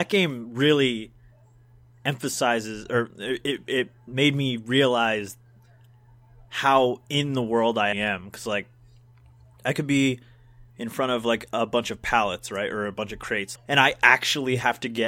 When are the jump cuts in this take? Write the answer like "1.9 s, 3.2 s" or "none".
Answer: 7.9 s, 13.6 s

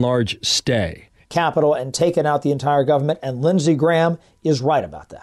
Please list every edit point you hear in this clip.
1.2 s

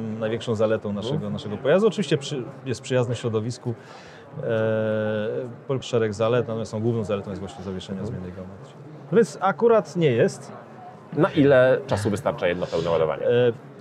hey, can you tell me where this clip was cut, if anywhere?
5.8 s, 9.1 s

